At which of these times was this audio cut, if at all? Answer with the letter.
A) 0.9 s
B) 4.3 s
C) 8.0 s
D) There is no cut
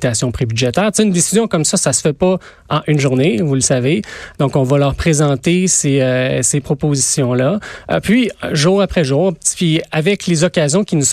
B